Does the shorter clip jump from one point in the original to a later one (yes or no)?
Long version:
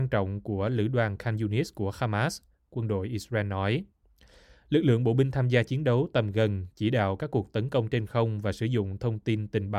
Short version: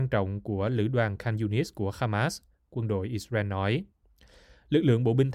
no